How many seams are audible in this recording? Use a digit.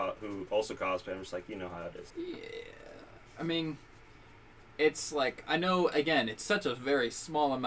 1